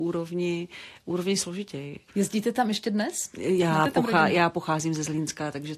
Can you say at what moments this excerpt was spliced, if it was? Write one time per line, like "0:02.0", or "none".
0:02.1